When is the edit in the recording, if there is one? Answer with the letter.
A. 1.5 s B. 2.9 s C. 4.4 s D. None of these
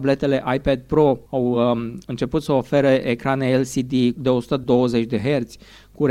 D